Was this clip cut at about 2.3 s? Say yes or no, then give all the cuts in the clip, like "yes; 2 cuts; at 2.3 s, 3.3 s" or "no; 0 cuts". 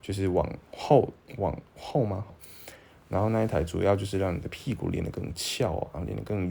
yes; 1 cut; at 2.3 s